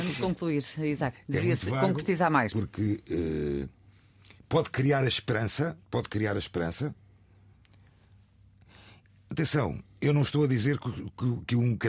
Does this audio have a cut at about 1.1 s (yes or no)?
yes